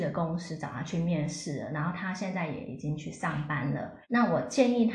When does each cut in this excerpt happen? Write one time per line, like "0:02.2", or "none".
0:04.0